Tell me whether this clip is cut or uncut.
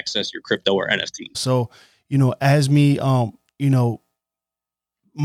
cut